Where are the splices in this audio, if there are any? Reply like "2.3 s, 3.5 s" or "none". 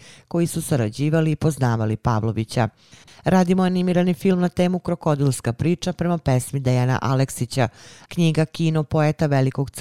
3.1 s, 8.1 s